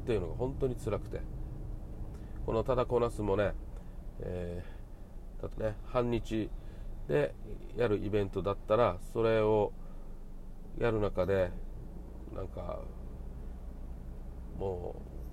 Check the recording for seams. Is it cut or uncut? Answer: cut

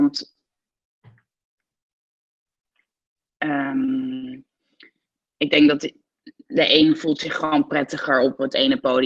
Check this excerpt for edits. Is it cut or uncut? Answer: uncut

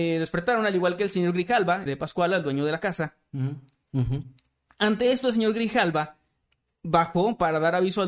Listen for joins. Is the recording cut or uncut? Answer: cut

